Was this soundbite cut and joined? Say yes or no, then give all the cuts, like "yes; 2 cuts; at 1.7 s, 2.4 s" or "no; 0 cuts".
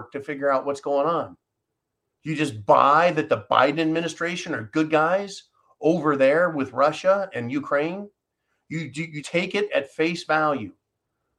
yes; 1 cut; at 9.2 s